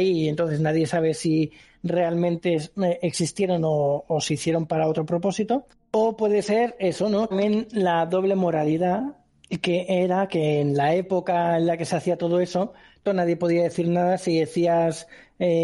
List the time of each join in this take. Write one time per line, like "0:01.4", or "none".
0:07.3
0:13.1